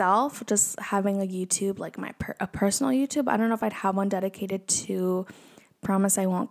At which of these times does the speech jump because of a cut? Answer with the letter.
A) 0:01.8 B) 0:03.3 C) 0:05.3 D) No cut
D